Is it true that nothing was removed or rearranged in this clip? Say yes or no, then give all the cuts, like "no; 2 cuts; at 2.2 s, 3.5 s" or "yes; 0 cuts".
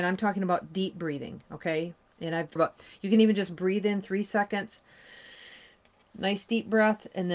no; 1 cut; at 2.6 s